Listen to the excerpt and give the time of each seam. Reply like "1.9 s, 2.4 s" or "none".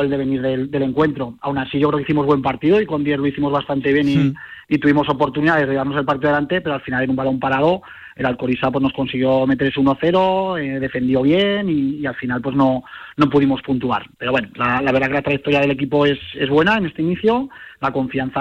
none